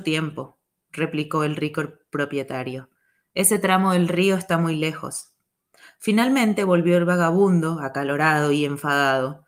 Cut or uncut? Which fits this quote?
uncut